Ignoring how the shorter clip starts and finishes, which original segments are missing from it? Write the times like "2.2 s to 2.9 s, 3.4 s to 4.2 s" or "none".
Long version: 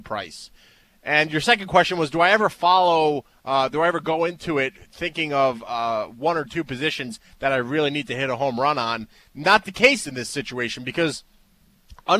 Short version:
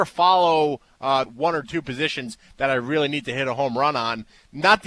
3.7 s to 6.1 s